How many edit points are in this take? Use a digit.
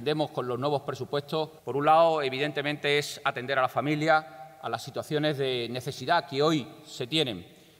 1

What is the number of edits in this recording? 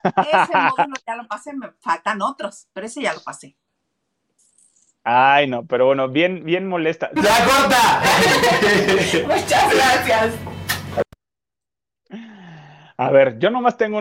1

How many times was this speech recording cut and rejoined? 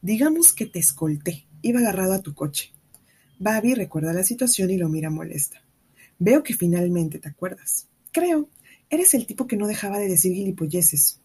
0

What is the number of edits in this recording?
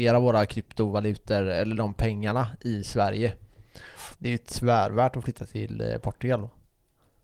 1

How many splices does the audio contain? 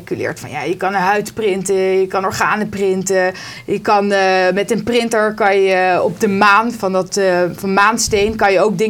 0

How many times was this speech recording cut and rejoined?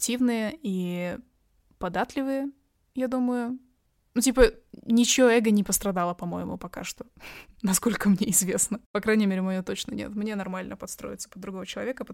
0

